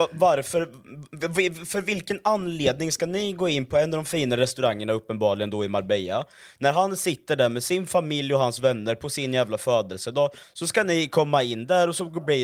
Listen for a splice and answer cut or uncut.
uncut